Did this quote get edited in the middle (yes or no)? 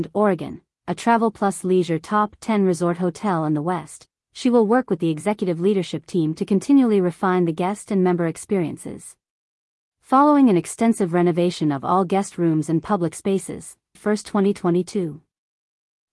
yes